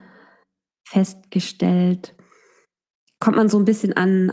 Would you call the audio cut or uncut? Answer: uncut